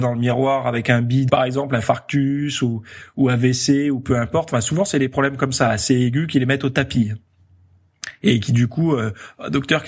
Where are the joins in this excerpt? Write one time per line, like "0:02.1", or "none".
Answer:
0:01.3

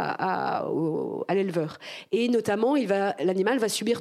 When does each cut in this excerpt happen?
none

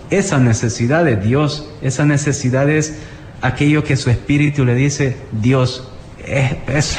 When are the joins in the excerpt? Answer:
none

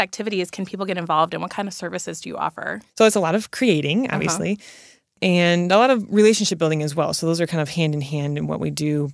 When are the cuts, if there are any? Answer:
0:02.9

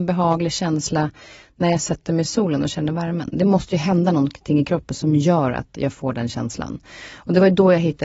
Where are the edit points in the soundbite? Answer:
none

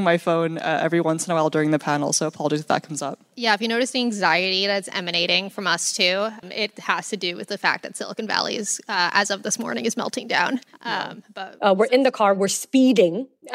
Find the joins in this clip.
0:06.4

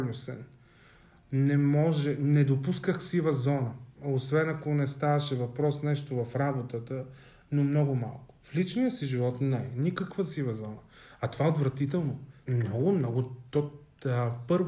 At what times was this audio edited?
0:03.9
0:12.5

